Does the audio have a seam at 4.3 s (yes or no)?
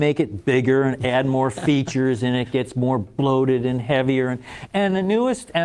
no